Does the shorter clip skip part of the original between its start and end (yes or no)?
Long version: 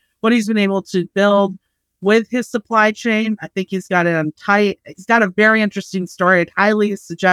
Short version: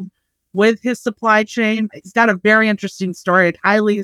yes